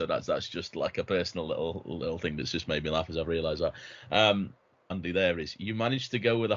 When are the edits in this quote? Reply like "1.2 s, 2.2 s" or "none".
4.9 s